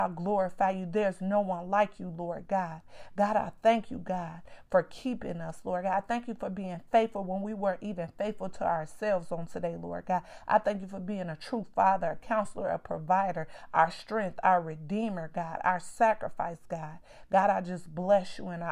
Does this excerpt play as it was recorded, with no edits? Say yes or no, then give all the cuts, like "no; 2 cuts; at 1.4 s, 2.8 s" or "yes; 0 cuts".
yes; 0 cuts